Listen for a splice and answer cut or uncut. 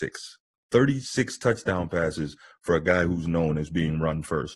uncut